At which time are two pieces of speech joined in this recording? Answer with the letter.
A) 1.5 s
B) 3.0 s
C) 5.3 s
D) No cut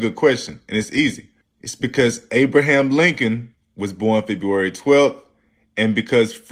D